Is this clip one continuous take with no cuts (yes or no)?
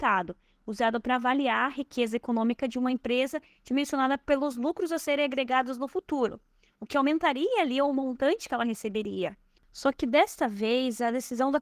no